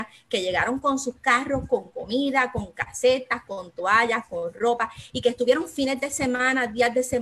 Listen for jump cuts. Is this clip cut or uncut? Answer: cut